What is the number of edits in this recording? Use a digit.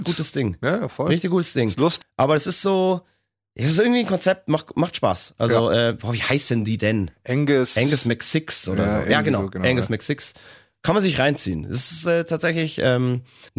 1